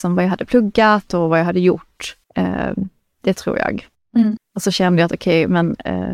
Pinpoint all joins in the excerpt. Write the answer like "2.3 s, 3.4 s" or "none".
2.2 s, 4.4 s